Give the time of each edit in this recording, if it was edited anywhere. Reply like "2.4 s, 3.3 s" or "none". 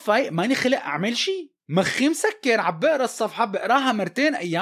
1.6 s